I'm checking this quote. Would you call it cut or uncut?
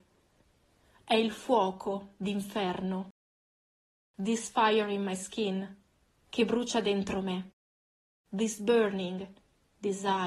uncut